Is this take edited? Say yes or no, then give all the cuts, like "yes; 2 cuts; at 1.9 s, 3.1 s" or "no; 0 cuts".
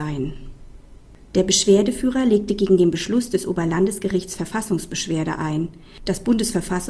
yes; 1 cut; at 6.0 s